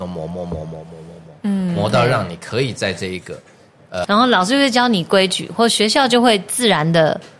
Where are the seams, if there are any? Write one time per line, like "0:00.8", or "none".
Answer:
0:04.0